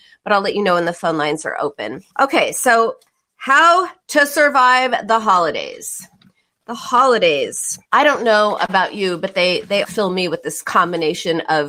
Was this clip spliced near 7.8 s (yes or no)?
yes